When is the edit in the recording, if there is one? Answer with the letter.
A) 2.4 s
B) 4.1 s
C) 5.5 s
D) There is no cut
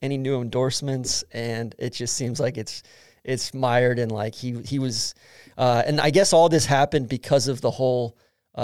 D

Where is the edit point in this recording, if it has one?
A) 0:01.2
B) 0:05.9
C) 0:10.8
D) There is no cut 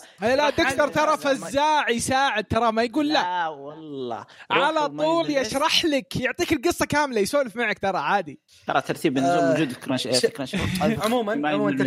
D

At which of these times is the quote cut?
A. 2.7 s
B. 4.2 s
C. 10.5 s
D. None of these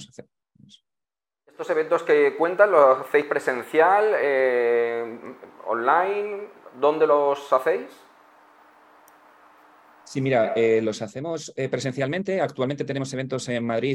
D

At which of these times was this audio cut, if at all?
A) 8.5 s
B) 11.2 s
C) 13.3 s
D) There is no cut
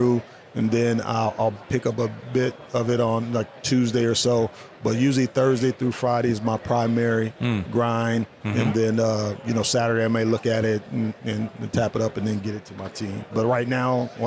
C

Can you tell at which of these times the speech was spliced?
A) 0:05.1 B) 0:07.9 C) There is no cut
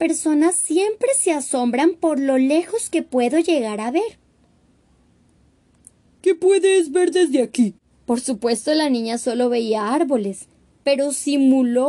B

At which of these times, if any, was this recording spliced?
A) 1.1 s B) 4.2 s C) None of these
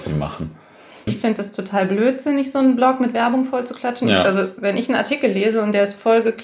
A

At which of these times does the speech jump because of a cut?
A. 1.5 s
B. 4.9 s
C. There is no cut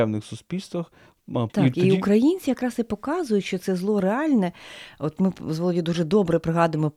A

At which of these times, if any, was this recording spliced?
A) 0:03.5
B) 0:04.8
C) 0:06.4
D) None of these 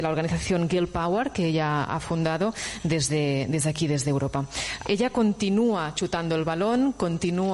B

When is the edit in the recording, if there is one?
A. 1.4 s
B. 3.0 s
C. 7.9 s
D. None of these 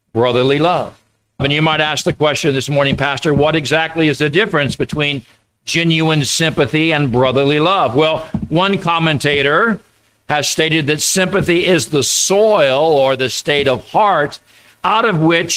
A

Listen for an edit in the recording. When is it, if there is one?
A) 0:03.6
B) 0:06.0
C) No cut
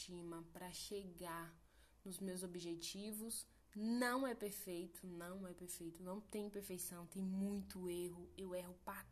C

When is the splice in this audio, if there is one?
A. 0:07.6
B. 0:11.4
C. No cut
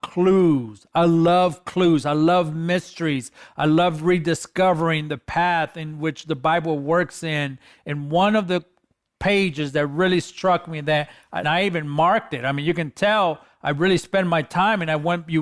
B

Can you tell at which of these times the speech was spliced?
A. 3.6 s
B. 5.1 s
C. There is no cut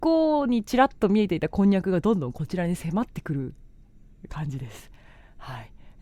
C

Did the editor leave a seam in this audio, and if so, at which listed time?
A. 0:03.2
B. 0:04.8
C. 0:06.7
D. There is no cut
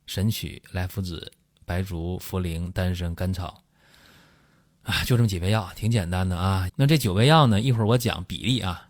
C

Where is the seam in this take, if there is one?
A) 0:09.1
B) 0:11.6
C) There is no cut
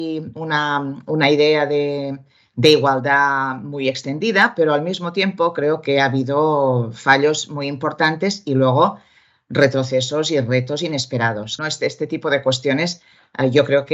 B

